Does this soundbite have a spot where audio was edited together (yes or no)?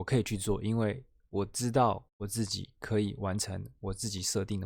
yes